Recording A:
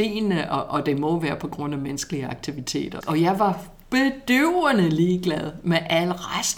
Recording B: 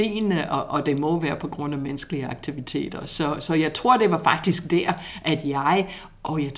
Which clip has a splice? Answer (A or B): A